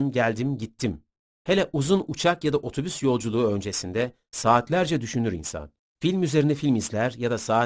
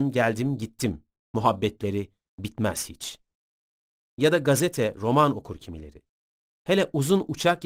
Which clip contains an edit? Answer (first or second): first